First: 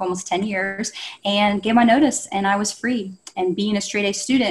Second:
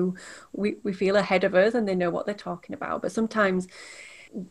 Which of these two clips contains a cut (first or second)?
first